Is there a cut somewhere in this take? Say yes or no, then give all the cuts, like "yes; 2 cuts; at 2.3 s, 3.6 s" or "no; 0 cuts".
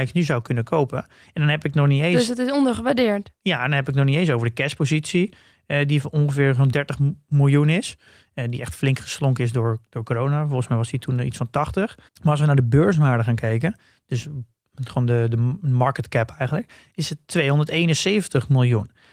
yes; 1 cut; at 12.1 s